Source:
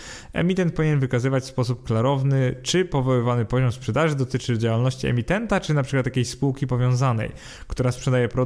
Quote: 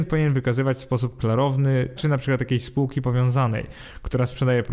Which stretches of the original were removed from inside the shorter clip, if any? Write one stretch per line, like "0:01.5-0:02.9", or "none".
0:02.6-0:05.6